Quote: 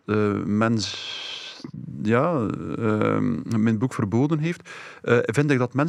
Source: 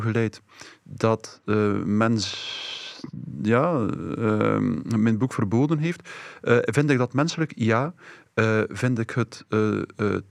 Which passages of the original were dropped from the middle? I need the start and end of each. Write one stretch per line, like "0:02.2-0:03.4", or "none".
none